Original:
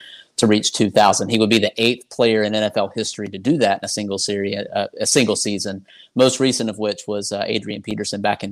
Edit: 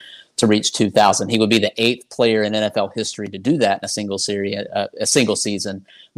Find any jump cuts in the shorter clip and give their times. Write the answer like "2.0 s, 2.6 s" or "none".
none